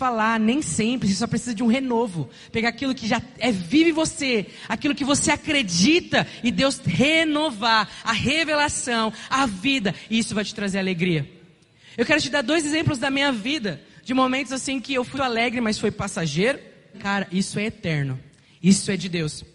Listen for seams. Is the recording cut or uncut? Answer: cut